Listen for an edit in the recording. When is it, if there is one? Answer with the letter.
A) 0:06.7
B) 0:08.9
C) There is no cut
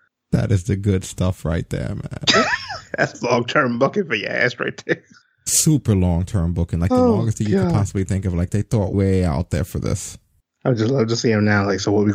B